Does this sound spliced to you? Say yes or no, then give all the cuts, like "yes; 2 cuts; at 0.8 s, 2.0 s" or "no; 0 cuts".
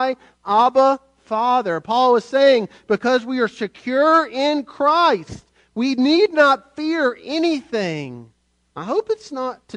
yes; 1 cut; at 8.7 s